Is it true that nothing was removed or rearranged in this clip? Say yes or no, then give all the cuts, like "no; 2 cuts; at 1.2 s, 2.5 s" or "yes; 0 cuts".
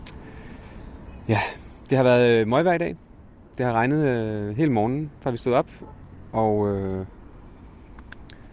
no; 1 cut; at 6.3 s